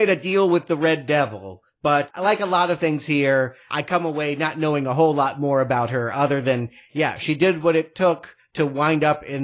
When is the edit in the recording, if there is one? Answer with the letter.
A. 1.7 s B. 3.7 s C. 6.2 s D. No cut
D